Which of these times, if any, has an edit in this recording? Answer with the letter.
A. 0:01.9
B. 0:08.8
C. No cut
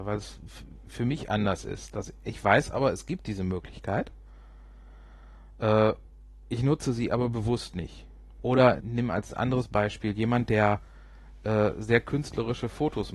B